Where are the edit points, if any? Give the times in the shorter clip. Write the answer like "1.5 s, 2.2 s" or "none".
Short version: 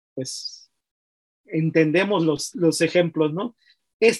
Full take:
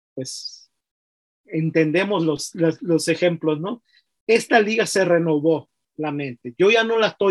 2.5 s